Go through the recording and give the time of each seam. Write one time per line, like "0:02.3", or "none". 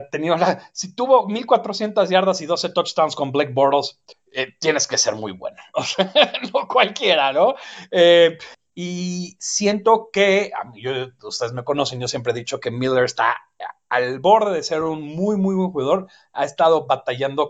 none